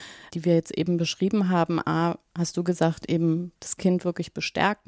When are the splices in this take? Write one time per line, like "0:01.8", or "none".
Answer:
none